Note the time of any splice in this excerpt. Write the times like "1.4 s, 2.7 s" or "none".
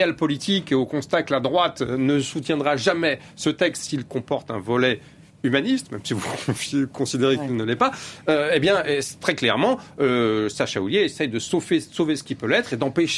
none